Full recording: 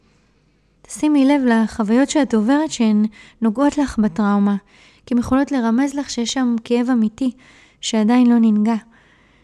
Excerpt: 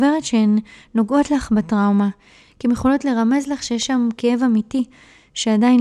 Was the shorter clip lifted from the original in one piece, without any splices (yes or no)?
yes